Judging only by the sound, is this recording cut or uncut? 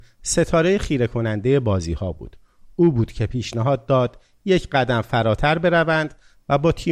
uncut